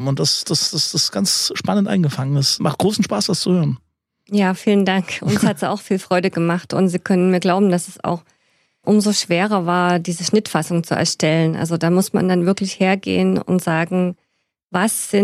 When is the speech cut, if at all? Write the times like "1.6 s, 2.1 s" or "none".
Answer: none